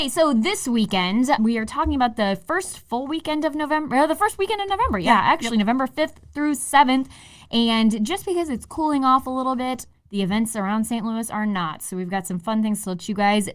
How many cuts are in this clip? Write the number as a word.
one